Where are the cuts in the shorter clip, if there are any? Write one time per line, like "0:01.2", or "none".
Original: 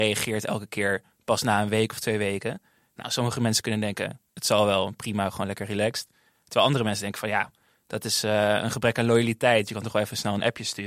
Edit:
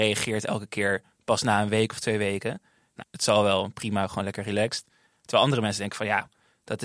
0:03.0